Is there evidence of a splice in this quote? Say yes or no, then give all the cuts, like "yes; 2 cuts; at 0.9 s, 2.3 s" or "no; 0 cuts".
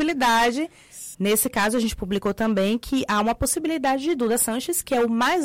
yes; 1 cut; at 1.1 s